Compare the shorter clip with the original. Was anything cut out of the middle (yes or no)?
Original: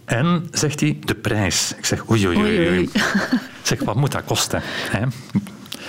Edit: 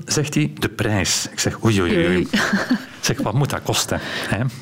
yes